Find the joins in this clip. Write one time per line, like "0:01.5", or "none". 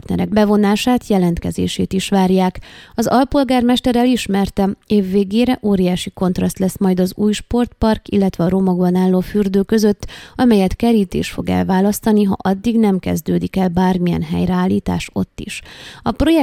none